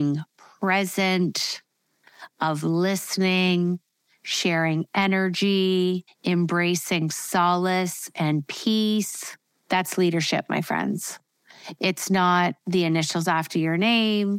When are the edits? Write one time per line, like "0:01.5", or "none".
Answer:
0:06.1
0:09.5